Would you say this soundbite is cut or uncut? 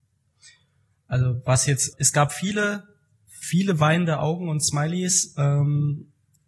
cut